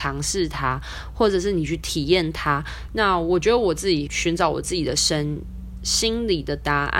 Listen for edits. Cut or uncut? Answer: cut